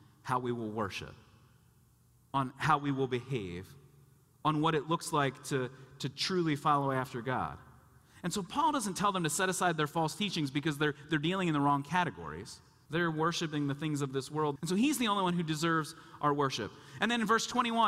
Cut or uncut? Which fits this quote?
cut